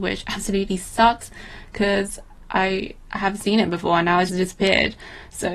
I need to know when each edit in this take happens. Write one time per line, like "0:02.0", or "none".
0:04.3